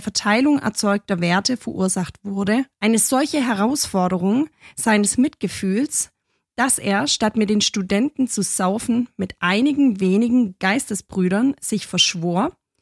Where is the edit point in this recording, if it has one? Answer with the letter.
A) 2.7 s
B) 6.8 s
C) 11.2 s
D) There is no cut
A